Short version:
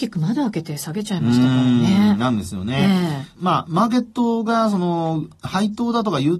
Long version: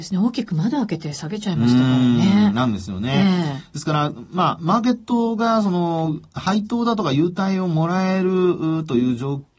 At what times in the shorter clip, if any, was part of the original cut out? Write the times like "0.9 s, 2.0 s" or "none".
3.4 s